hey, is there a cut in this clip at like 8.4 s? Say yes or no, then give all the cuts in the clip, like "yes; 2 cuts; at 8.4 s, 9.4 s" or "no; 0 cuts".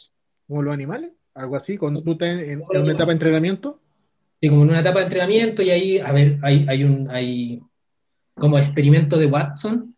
yes; 1 cut; at 8.4 s